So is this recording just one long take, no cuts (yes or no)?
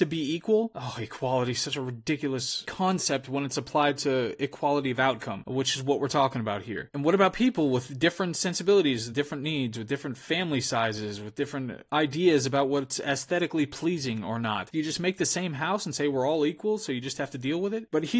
yes